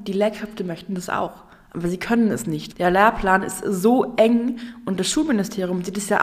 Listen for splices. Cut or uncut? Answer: cut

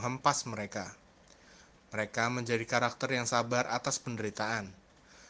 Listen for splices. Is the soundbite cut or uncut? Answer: cut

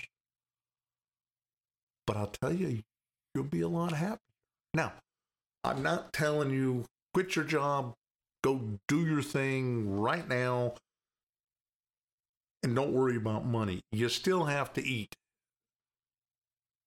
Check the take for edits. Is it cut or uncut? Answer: uncut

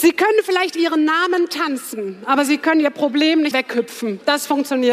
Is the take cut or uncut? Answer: cut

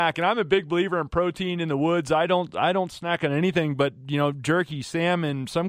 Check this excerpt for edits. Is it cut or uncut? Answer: uncut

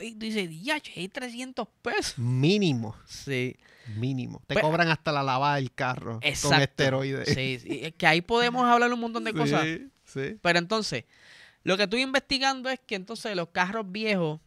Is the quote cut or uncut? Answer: uncut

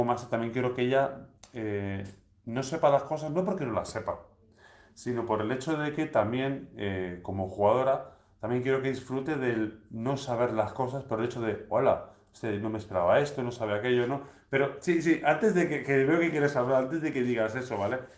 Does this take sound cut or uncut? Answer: uncut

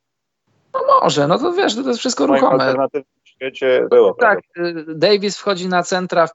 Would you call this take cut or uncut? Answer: cut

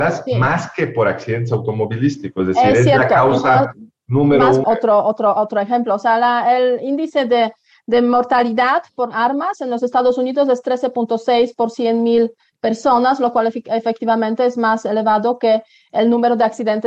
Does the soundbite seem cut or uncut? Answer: cut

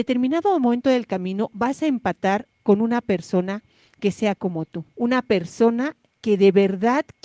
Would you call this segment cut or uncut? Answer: cut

